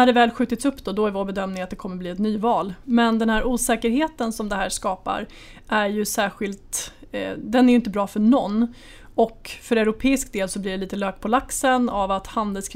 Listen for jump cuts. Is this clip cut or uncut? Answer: cut